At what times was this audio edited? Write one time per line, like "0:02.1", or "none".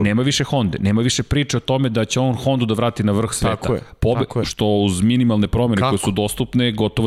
0:04.4